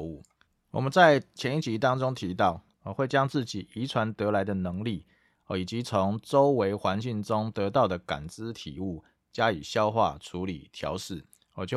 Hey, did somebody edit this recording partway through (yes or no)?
yes